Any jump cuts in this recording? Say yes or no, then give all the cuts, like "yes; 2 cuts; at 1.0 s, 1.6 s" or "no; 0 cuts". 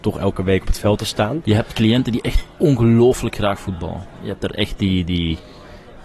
no; 0 cuts